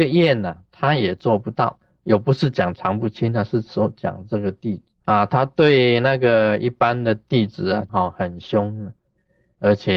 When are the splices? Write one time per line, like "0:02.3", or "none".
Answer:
0:04.9
0:07.9